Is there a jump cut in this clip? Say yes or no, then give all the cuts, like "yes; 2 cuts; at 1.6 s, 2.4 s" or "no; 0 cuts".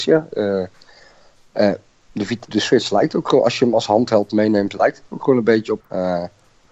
yes; 2 cuts; at 2.5 s, 5.8 s